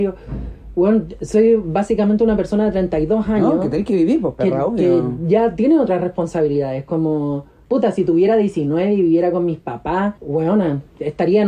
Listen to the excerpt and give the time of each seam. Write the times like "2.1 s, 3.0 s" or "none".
10.2 s